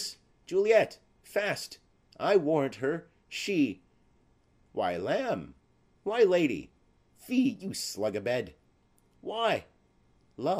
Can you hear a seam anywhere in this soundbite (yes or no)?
no